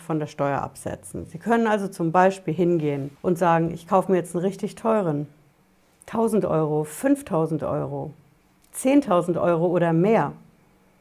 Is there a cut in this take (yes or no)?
no